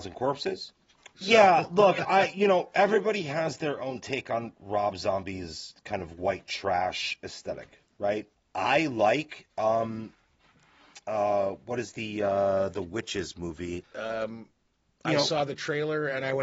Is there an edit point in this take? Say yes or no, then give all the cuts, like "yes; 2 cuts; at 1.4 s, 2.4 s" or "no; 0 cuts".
yes; 3 cuts; at 1.2 s, 8.3 s, 13.8 s